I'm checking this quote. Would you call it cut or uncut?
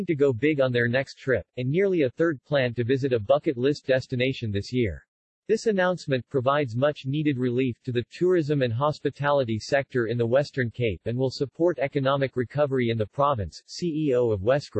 cut